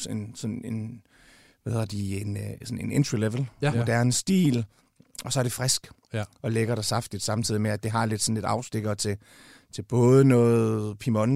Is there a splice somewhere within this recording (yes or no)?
yes